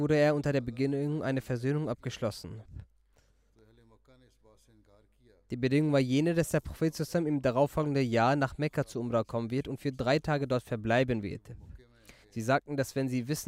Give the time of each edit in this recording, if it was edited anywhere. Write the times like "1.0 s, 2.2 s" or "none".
12.2 s

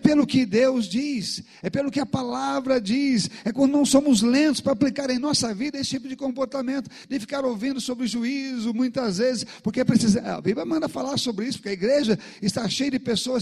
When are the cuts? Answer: none

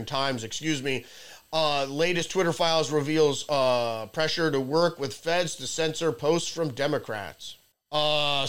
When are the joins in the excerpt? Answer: none

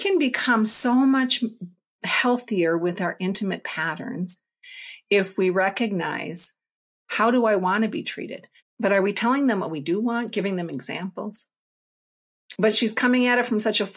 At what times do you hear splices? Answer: 8.6 s, 12.6 s

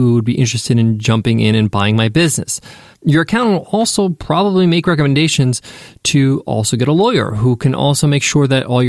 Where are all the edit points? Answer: none

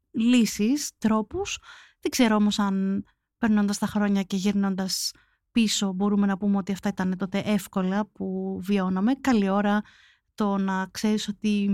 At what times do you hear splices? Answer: none

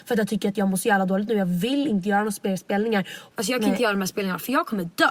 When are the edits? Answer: 3.3 s

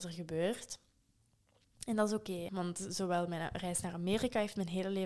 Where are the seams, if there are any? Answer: 2.5 s

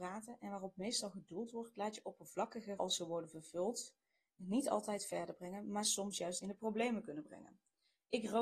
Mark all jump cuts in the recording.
2.8 s

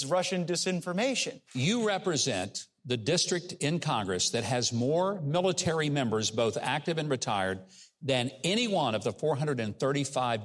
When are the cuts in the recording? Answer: none

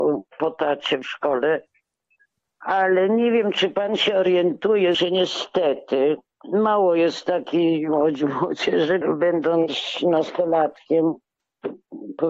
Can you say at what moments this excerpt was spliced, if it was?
4.9 s, 9.0 s

